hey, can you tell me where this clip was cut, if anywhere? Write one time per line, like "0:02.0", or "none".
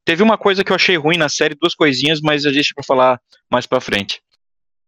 none